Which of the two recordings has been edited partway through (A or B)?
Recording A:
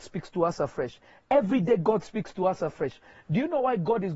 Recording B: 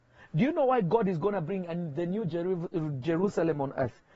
A